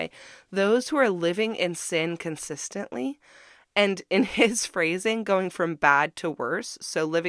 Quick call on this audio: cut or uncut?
uncut